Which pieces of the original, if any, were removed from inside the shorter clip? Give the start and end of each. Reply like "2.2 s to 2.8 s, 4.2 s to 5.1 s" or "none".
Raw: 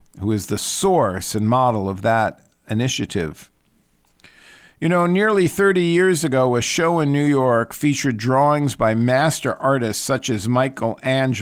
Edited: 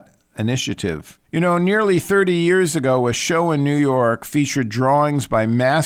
3.6 s to 4.7 s